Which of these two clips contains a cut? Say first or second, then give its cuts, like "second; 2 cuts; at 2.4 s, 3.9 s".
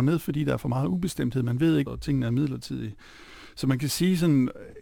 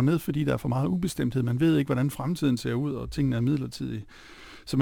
first; 1 cut; at 1.9 s